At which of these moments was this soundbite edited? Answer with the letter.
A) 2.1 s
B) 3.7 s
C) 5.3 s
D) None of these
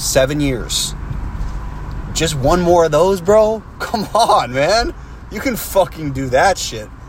D